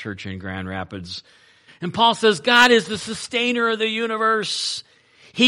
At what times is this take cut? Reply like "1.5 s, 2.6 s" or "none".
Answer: 1.7 s